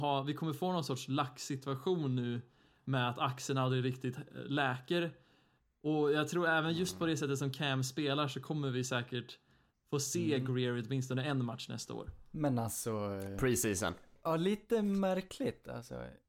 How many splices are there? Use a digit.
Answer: 0